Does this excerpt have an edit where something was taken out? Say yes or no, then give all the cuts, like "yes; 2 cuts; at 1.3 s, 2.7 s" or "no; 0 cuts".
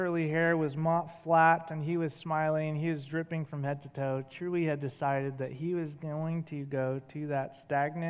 no; 0 cuts